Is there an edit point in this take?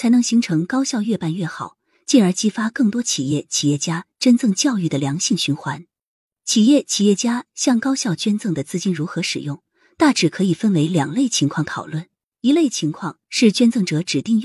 no; 0 cuts

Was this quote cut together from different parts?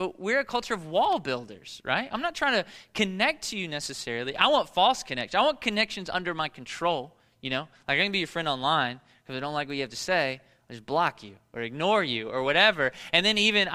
no; 0 cuts

